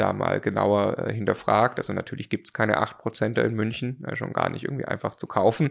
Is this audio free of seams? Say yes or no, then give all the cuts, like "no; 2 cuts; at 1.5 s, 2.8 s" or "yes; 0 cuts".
no; 1 cut; at 4.1 s